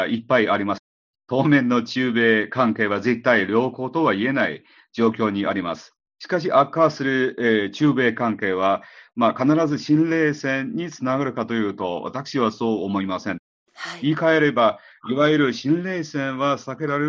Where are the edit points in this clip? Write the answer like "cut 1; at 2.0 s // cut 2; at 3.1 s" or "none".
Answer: none